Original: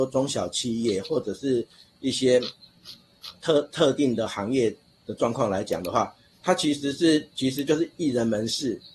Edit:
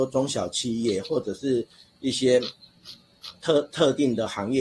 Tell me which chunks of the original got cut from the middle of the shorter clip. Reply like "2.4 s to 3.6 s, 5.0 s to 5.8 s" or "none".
none

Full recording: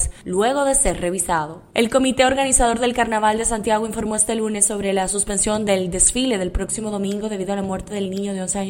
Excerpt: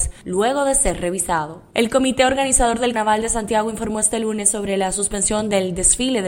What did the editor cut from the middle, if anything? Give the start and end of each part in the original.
2.9 s to 3.1 s

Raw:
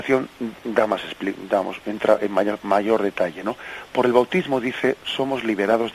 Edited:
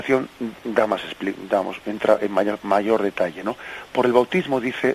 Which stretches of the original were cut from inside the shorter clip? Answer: none

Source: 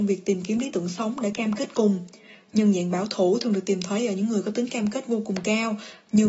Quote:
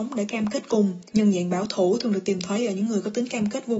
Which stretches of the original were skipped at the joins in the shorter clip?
2.1 s to 2.5 s

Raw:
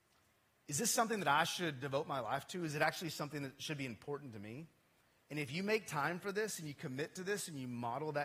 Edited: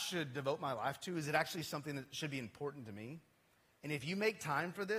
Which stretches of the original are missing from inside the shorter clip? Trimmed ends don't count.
none

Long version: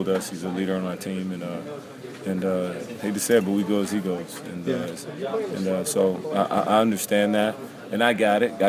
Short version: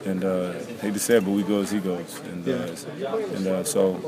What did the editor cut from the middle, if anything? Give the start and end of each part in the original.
none

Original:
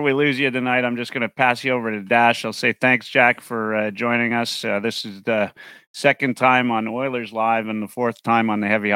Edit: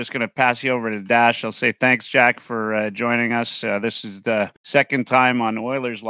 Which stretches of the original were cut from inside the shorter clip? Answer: 5.6 s to 5.9 s

